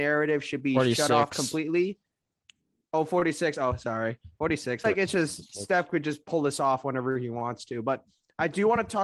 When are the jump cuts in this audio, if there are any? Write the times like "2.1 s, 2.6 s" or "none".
4.8 s